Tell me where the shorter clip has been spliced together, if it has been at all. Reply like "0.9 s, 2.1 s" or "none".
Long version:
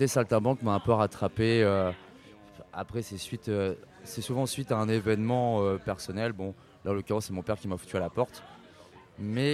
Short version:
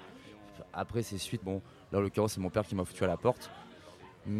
1.4 s